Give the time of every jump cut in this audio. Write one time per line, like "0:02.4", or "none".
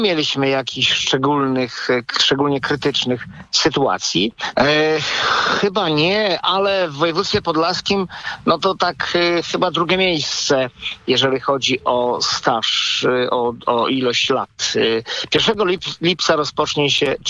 0:04.5